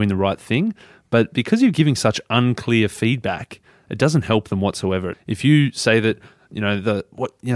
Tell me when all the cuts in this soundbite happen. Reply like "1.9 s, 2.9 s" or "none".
5.1 s